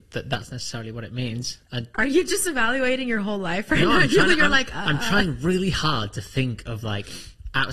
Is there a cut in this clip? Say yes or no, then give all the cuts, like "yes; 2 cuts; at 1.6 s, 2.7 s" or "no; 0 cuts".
yes; 1 cut; at 1.6 s